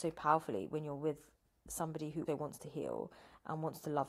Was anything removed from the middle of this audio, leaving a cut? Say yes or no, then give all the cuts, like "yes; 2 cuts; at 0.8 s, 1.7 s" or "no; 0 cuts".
yes; 1 cut; at 2.3 s